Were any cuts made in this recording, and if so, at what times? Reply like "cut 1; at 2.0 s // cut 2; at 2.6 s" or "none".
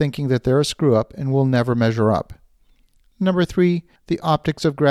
none